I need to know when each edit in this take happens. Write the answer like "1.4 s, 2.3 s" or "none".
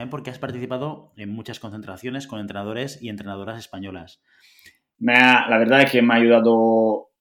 4.9 s